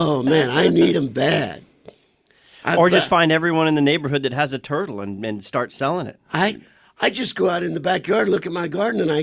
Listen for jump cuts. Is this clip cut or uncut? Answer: uncut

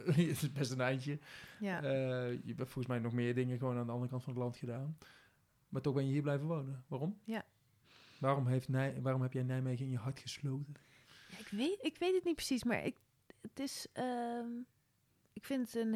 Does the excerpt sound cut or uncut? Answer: uncut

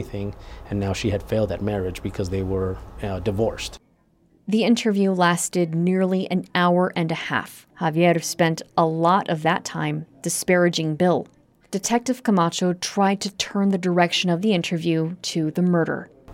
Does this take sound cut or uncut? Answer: cut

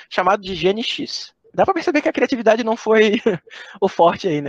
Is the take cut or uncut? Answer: uncut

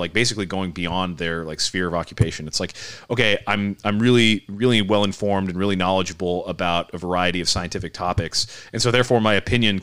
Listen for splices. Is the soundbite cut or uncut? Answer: uncut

